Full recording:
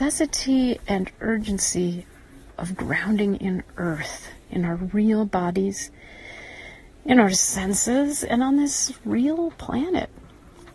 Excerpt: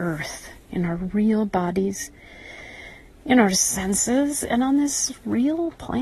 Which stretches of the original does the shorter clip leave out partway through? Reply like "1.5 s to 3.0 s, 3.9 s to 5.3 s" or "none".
none